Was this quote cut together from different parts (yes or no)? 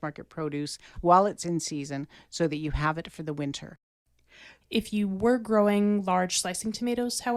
yes